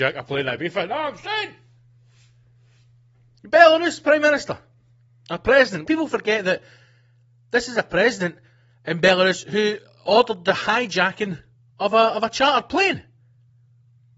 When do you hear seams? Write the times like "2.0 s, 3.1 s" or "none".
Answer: 5.8 s